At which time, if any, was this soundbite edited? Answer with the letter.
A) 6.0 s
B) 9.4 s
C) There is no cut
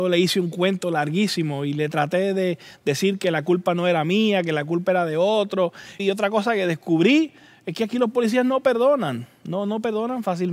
A